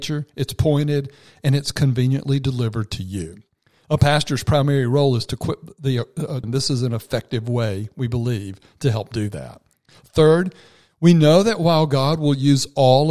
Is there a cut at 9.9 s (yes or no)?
no